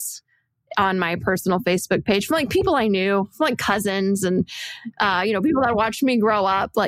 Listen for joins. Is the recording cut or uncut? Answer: uncut